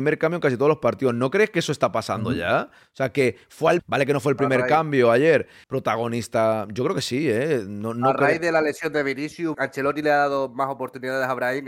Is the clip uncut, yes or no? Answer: no